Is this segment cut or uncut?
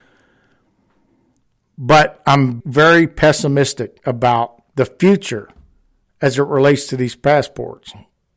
cut